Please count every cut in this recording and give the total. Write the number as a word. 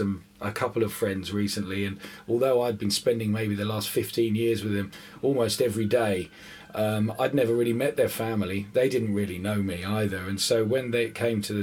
zero